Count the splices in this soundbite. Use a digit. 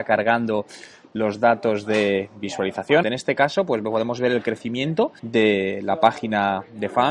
2